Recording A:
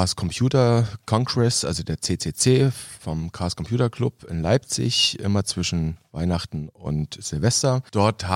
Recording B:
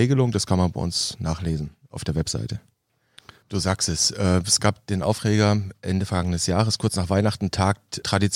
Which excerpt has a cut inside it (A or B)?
B